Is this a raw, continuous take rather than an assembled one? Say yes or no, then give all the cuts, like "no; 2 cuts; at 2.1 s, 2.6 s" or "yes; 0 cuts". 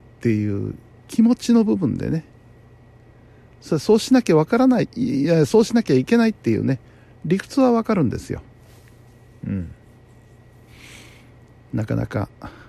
yes; 0 cuts